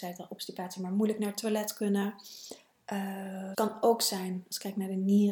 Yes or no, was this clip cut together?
yes